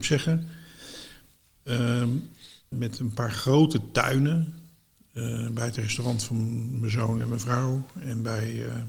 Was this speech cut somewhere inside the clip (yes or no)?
yes